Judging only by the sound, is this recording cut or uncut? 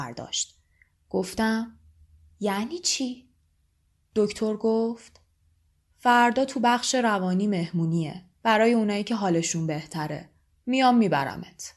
cut